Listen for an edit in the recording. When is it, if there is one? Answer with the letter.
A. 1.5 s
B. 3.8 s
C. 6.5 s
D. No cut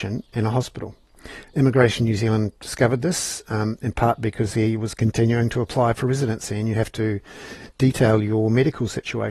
D